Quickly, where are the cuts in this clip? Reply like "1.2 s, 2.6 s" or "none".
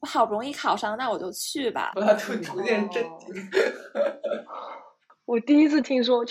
1.9 s